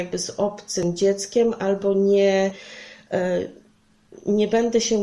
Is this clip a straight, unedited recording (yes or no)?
yes